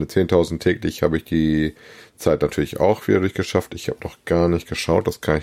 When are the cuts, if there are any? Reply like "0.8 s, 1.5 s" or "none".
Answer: none